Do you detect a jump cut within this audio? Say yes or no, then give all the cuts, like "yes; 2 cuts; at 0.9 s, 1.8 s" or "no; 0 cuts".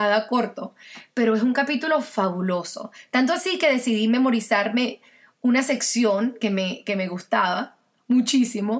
no; 0 cuts